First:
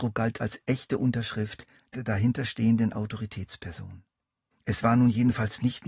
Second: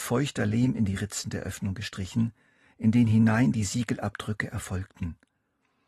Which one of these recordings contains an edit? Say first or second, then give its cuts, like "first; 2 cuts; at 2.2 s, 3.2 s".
first; 1 cut; at 4.5 s